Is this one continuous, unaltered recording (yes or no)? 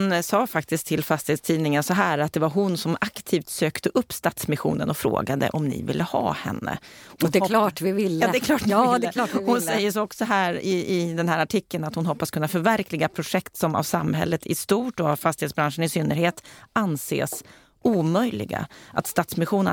yes